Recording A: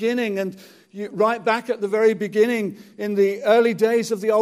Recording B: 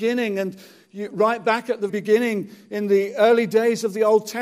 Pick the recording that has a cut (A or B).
B